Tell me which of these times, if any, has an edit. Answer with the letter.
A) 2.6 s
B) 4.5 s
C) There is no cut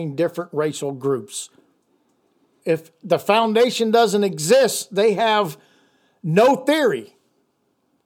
A